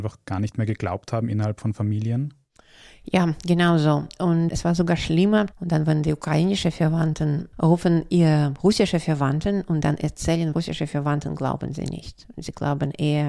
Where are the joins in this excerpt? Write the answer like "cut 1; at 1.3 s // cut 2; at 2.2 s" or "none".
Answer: cut 1; at 5.5 s // cut 2; at 10.5 s